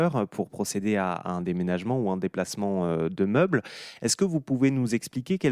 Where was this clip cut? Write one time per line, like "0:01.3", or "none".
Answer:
none

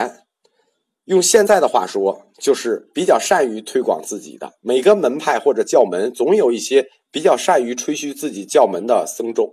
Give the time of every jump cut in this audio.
none

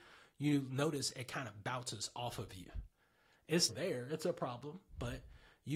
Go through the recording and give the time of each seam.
0:03.7

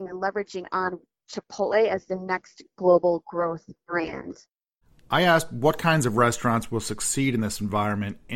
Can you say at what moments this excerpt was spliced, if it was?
none

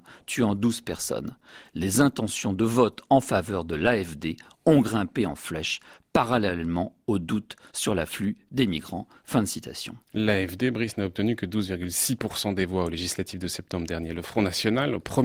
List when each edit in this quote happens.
none

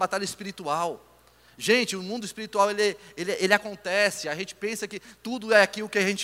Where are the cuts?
none

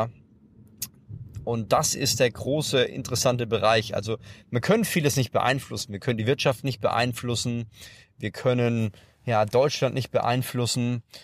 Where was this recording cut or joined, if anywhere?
none

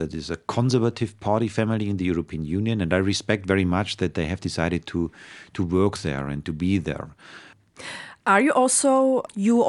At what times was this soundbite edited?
0:07.5

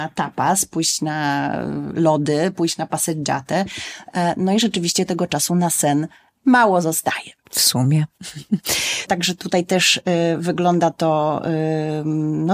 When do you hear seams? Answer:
0:09.1

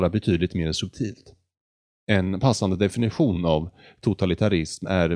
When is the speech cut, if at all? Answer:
none

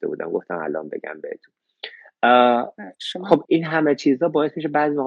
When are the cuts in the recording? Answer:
0:03.5

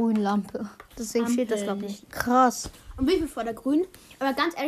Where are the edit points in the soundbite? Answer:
0:02.0

